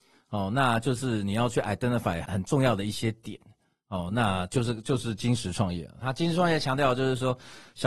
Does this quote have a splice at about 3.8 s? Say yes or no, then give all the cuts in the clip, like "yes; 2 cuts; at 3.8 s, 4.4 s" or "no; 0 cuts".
no; 1 cut; at 2.2 s